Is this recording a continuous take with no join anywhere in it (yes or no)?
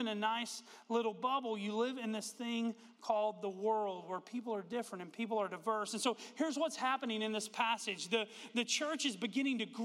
yes